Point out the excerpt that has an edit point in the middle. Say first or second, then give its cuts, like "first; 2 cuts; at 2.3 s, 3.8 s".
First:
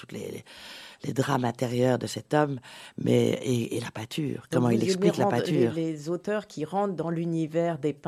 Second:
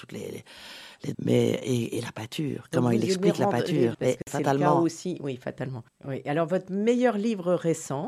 second; 3 cuts; at 1.1 s, 3.9 s, 5.9 s